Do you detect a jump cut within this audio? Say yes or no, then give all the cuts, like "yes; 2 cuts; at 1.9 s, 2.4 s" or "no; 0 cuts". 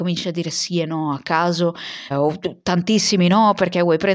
yes; 1 cut; at 2.1 s